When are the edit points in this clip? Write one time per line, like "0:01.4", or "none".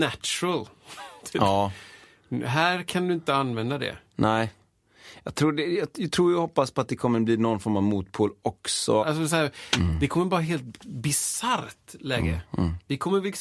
0:09.0